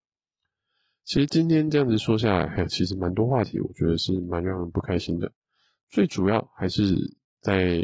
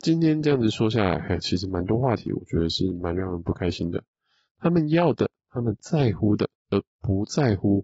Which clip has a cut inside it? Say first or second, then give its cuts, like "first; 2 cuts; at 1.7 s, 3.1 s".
second; 2 cuts; at 4.5 s, 6.6 s